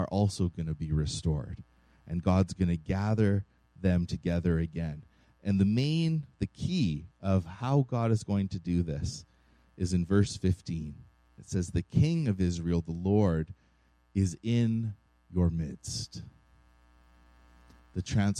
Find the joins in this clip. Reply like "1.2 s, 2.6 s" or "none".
11.4 s